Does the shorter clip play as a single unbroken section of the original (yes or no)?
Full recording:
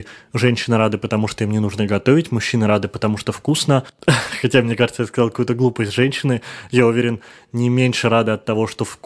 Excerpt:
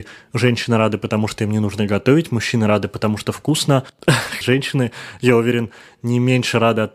no